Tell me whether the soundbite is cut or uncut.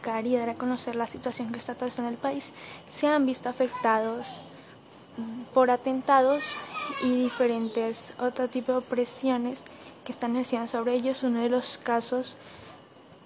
uncut